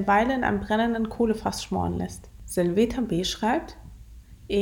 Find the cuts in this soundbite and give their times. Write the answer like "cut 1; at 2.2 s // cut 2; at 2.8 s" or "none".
none